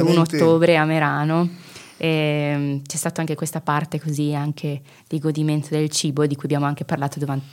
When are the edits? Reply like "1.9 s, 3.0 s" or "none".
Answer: none